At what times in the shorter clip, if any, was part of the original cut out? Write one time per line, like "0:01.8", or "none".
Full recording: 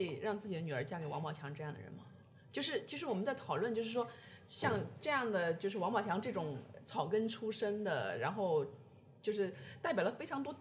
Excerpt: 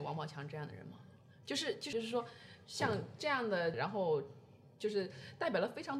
0:01.9
0:03.7